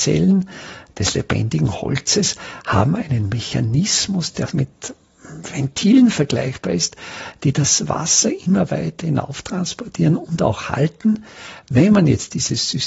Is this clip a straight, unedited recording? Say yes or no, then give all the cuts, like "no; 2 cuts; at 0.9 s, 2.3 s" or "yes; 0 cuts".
yes; 0 cuts